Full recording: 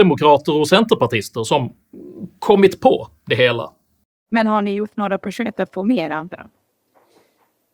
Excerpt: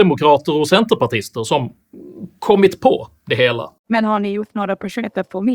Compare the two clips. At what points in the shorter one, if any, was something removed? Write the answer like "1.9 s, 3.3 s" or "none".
3.8 s